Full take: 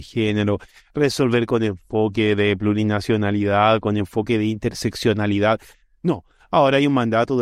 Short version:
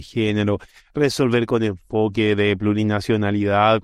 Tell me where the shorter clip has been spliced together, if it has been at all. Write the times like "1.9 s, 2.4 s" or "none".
none